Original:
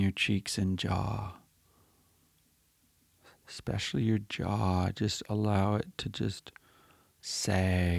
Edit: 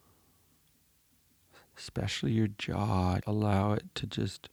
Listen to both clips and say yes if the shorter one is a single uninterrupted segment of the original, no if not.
no